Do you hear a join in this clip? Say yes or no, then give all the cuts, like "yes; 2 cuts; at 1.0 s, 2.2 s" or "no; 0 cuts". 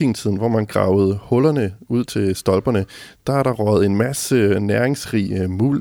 no; 0 cuts